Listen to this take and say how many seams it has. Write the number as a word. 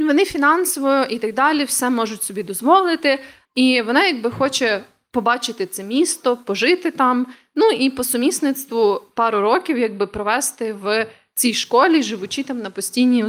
one